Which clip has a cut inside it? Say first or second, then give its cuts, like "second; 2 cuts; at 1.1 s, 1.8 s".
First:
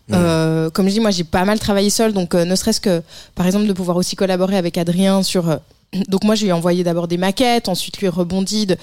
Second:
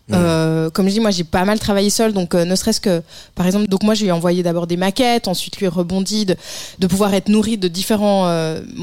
second; 1 cut; at 3.7 s